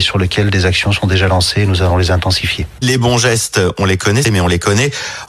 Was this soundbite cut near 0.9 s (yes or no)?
no